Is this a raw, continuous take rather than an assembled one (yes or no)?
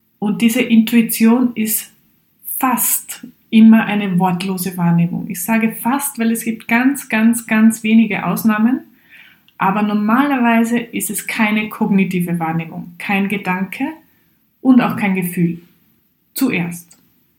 yes